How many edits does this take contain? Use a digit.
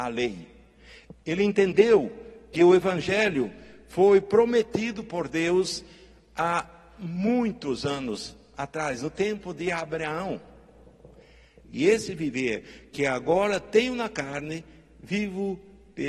2